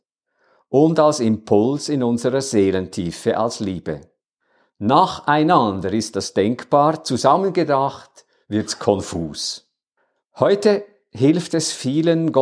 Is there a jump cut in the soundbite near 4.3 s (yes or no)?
no